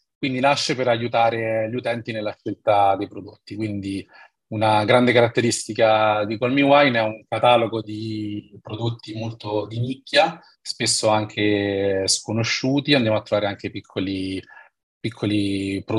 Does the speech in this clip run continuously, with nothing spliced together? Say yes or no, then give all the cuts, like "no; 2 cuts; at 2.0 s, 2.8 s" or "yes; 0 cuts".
yes; 0 cuts